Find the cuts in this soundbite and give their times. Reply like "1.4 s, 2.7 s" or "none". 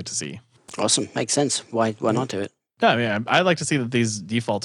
none